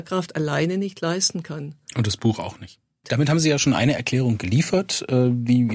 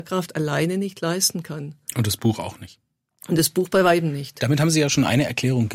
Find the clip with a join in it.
first; 1 cut; at 3.0 s

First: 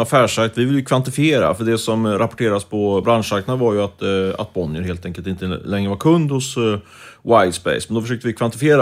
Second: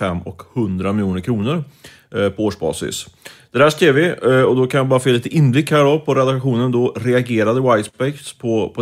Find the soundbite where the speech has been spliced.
first; 1 cut; at 3.0 s

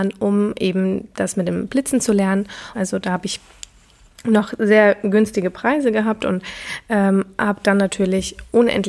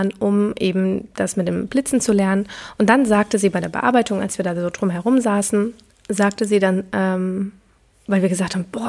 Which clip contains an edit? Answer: first; 1 cut; at 2.7 s

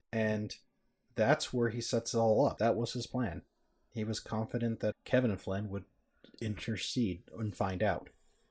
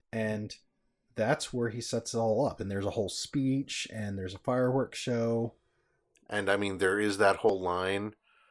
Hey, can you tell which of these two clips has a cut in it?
first; 2 cuts; at 2.6 s, 4.9 s

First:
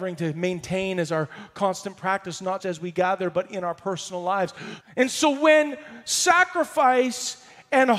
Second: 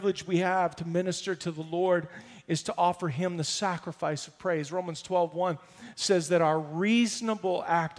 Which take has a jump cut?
first; 2 cuts; at 2.6 s, 4.8 s

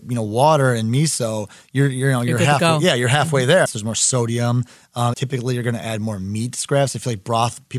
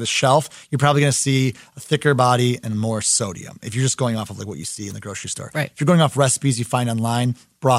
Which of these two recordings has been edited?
first; 2 cuts; at 3.7 s, 5.1 s

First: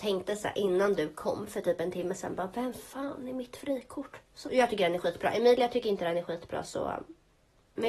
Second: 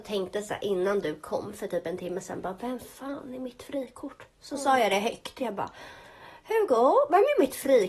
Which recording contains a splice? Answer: first; 1 cut; at 4.4 s

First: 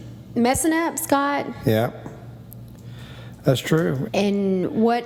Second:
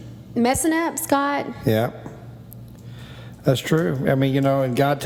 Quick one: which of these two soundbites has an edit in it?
first; 1 cut; at 4.0 s

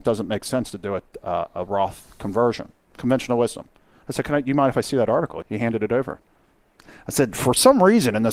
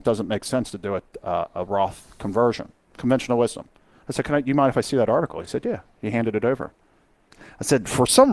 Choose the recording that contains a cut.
first; 1 cut; at 5.4 s

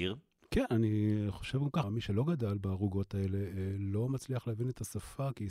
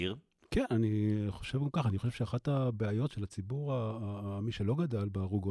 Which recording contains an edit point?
first; 1 cut; at 1.8 s

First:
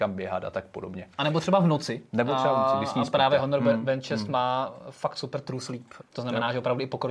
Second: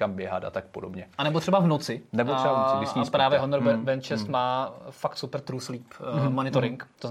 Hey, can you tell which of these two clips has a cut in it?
first; 1 cut; at 6.0 s

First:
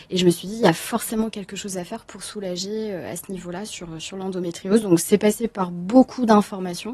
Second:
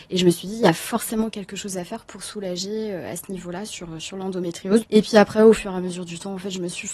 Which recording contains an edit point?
second; 1 cut; at 4.8 s

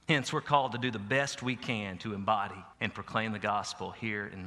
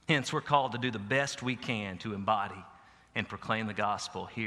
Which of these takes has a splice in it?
first; 1 cut; at 2.7 s

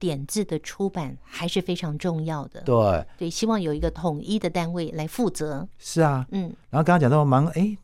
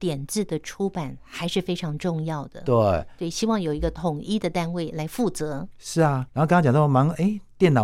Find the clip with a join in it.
second; 1 cut; at 6.3 s

